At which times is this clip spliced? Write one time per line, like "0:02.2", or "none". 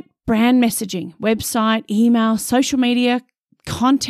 none